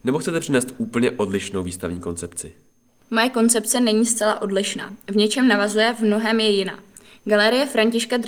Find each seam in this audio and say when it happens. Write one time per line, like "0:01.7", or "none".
none